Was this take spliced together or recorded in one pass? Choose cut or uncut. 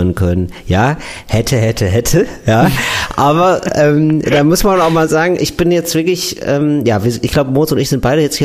uncut